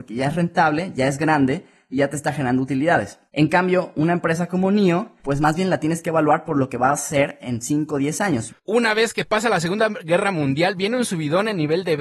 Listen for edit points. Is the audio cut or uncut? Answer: cut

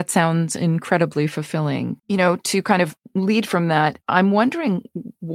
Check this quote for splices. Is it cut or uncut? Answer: cut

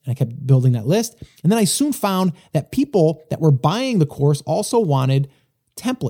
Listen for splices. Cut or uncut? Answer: uncut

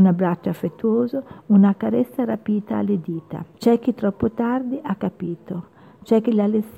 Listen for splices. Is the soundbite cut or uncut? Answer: cut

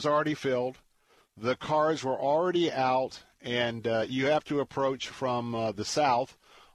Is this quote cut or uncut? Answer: uncut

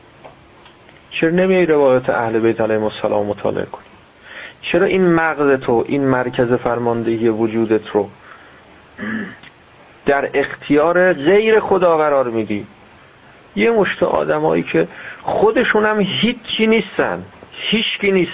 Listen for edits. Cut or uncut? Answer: uncut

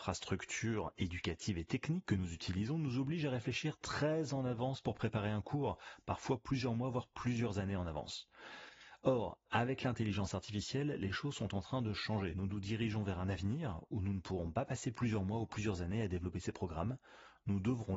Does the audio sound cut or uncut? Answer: uncut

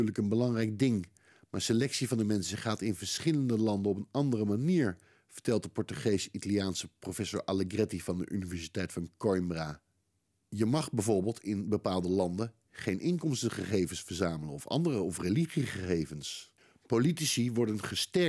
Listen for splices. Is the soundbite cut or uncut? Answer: uncut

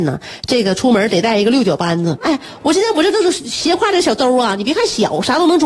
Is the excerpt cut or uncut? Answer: cut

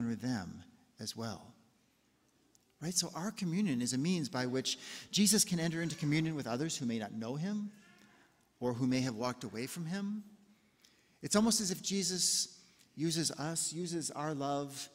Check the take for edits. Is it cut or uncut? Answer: uncut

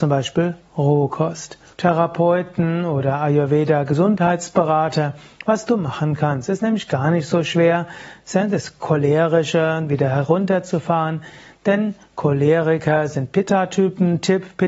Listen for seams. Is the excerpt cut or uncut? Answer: cut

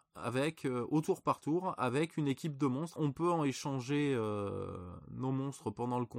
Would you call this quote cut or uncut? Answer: cut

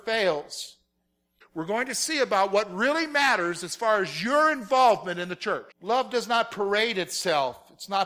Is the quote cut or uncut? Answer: cut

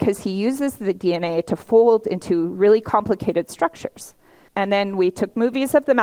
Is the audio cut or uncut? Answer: cut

